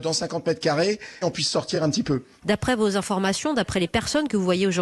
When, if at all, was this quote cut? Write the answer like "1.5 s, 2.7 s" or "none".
1.2 s, 2.4 s